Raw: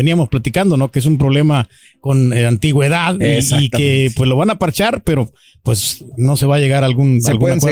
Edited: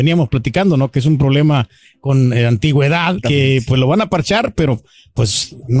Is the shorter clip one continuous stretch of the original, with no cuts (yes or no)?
no